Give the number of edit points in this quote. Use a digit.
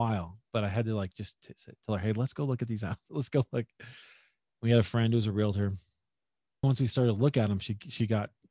1